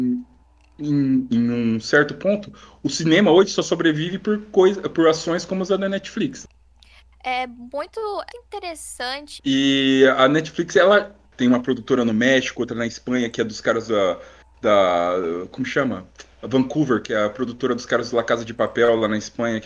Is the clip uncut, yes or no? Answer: no